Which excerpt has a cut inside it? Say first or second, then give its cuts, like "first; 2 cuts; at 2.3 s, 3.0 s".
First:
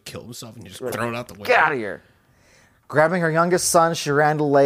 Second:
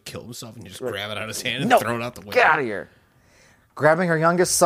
first; 1 cut; at 0.9 s